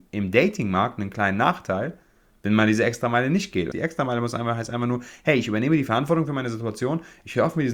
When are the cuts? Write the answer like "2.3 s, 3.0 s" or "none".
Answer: 3.7 s

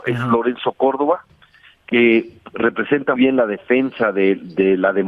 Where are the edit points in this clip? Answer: 3.2 s

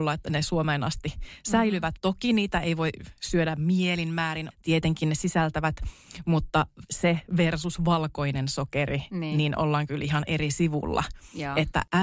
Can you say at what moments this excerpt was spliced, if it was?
2.0 s, 4.5 s

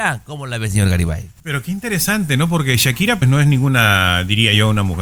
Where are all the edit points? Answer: 3.2 s

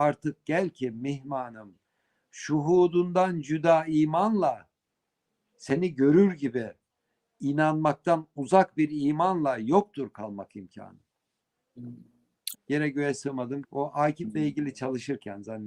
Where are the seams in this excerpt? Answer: 12.5 s, 13.6 s

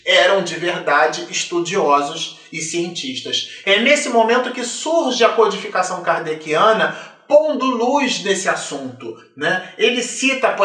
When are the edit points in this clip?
3.6 s

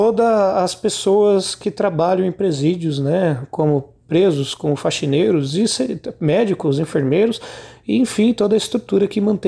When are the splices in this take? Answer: none

